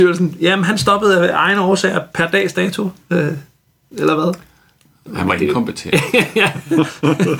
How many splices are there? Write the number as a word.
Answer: zero